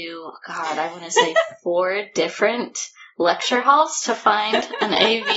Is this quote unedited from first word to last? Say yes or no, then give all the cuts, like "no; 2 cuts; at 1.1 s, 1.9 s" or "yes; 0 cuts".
yes; 0 cuts